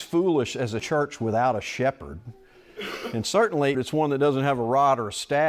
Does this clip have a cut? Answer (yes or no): yes